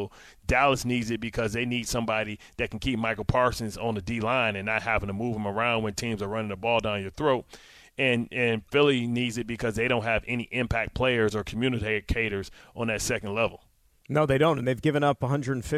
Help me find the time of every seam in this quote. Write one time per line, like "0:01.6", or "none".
none

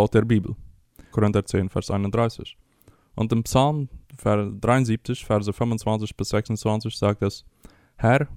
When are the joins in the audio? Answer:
0:01.1

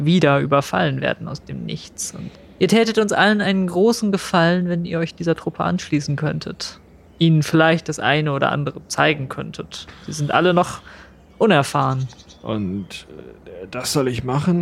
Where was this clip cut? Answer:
none

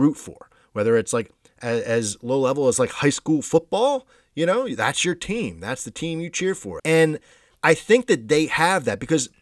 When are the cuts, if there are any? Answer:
0:06.8

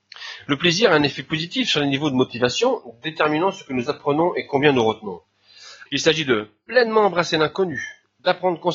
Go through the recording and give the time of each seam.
0:05.9

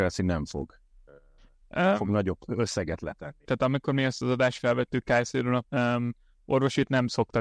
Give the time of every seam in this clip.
0:03.5
0:05.6

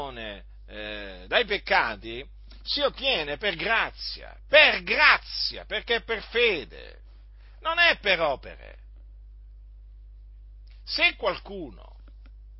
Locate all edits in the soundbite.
none

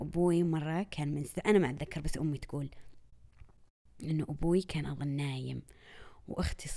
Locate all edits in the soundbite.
none

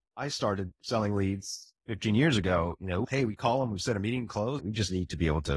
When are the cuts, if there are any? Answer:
0:03.0
0:04.6

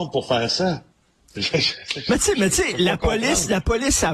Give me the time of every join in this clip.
none

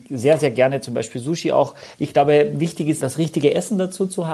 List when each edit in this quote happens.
0:01.9
0:03.0

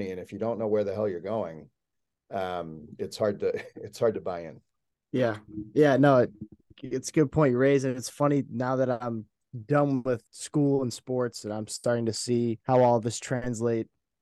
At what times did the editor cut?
0:06.7
0:10.3
0:12.6

